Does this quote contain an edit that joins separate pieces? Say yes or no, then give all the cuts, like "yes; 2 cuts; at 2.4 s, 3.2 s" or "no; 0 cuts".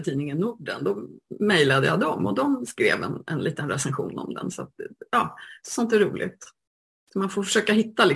yes; 1 cut; at 5.6 s